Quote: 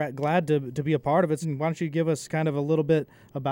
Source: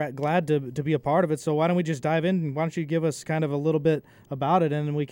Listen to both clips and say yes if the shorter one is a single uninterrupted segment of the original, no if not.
no